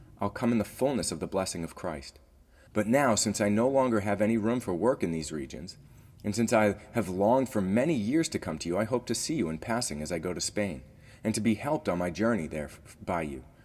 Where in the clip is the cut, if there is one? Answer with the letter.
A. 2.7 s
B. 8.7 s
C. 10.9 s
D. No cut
A